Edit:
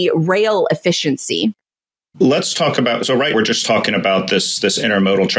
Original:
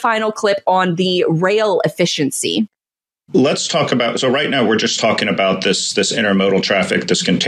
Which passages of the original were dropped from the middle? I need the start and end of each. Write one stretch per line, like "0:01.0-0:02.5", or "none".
0:04.5-0:04.7